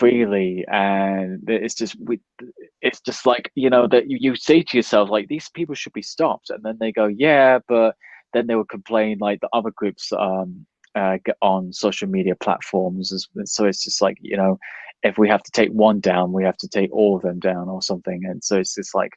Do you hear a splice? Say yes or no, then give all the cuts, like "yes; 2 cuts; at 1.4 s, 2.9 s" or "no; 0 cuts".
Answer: no; 0 cuts